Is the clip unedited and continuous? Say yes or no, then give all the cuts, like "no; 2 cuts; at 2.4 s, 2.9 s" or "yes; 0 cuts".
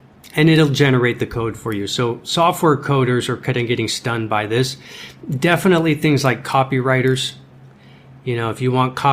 yes; 0 cuts